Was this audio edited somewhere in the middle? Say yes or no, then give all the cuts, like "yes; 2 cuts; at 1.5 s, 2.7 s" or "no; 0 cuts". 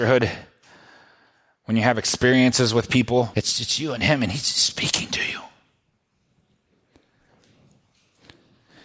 yes; 1 cut; at 3.3 s